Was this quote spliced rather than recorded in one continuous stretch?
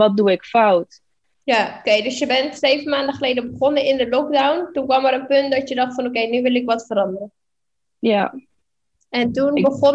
no; 0 cuts

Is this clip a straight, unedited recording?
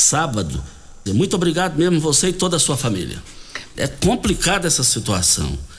no; 2 cuts; at 1.1 s, 3.7 s

